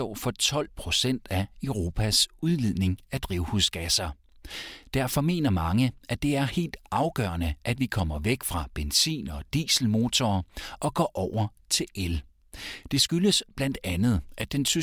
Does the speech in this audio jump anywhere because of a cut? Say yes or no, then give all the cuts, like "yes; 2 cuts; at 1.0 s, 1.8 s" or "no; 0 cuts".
yes; 1 cut; at 12.9 s